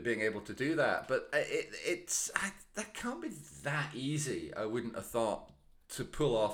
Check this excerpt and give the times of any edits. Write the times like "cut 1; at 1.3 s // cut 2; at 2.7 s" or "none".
none

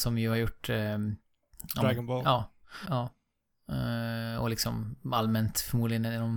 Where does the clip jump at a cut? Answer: cut 1; at 2.8 s

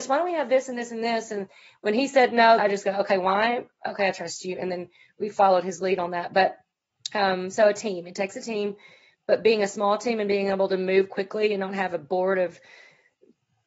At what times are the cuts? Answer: cut 1; at 2.6 s

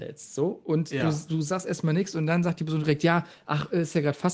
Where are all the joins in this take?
none

